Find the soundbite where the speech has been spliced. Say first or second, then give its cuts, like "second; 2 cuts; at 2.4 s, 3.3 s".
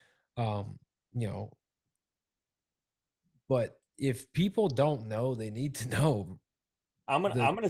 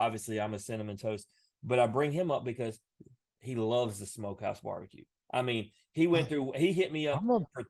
first; 1 cut; at 3.9 s